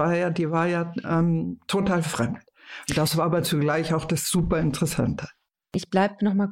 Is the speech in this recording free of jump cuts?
yes; 0 cuts

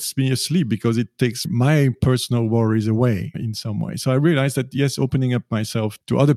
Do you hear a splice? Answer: no; 0 cuts

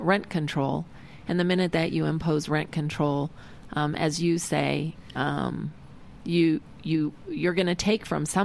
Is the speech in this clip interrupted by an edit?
no; 0 cuts

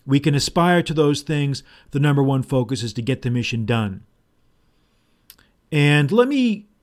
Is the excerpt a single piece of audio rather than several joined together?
no; 1 cut; at 1.9 s

